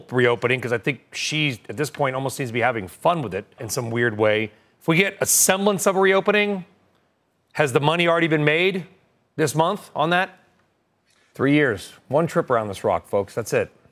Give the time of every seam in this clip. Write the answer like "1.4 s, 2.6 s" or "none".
3.6 s, 11.3 s